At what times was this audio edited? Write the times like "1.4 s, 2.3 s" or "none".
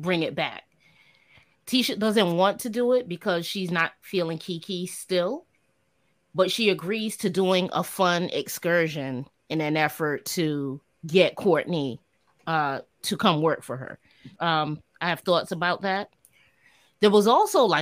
14.4 s